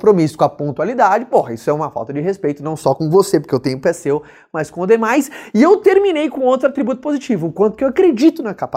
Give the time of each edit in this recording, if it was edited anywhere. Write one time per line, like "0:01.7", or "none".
none